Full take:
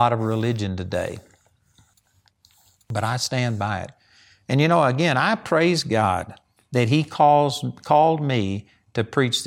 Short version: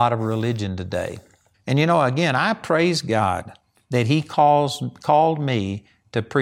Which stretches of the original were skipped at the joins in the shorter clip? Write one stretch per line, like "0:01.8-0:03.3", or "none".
0:01.5-0:04.4